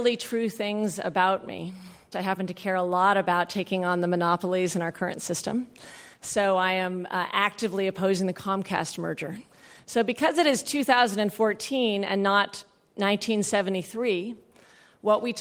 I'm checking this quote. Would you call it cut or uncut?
cut